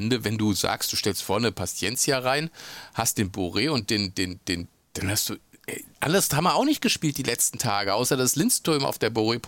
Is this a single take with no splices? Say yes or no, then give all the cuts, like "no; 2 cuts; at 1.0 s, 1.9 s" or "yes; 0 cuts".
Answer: no; 1 cut; at 5.9 s